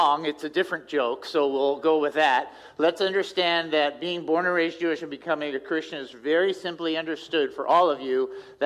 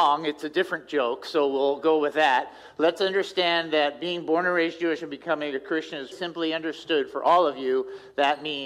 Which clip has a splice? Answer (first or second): second